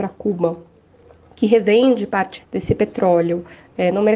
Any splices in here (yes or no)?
yes